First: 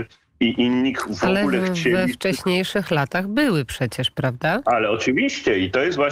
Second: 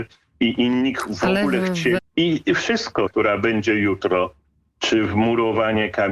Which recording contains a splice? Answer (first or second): second